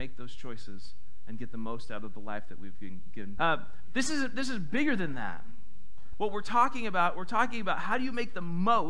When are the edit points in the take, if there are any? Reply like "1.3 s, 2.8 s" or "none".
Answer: 3.4 s, 6.1 s